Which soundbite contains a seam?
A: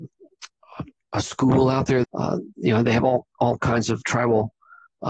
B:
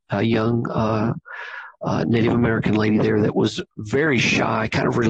A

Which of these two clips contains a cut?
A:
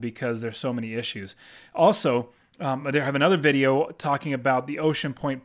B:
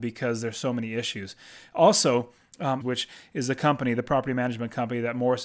B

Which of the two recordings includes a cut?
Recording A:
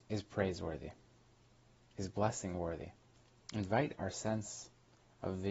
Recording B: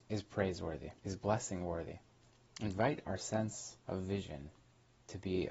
B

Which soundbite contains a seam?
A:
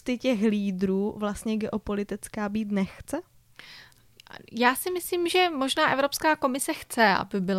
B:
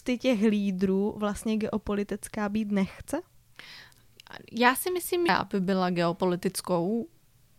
B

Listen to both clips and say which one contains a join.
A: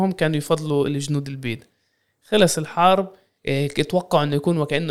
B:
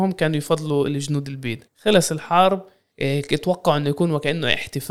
B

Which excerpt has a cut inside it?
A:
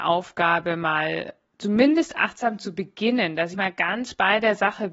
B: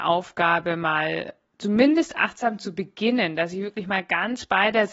A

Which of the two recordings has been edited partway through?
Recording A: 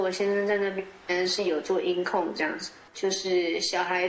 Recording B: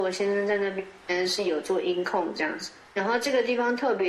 A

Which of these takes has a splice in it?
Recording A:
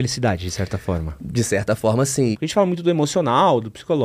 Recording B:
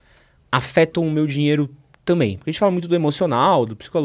A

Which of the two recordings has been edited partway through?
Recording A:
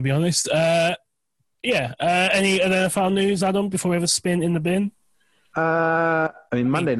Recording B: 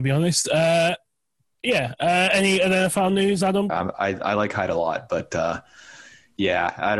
B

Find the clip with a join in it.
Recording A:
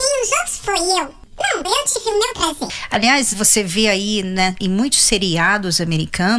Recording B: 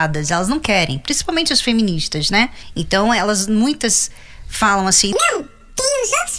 A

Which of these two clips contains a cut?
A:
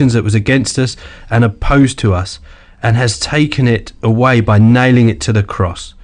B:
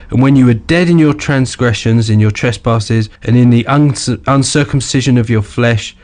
B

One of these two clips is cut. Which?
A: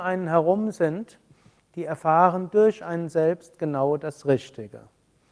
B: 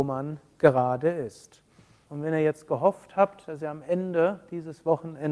B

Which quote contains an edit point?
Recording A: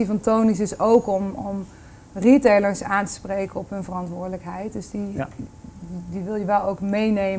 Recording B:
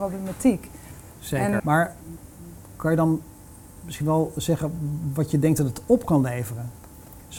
B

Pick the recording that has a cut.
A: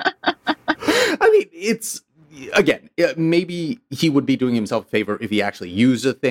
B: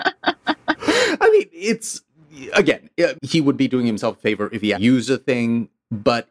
B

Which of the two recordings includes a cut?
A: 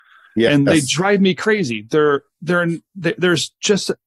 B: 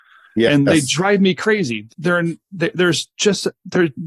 B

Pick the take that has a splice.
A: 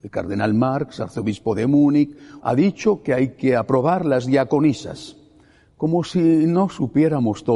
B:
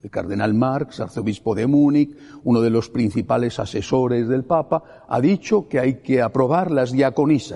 A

